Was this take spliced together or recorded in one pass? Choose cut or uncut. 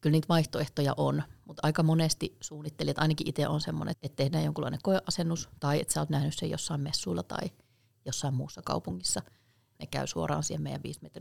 cut